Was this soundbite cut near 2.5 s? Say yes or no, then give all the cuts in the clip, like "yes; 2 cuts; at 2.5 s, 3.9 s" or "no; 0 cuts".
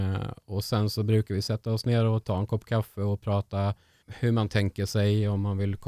no; 1 cut; at 4.0 s